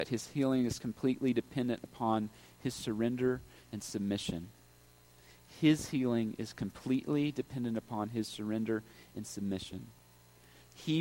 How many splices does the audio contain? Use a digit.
0